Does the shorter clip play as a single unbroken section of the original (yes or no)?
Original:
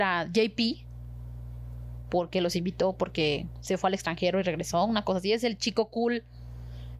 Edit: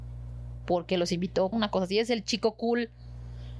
no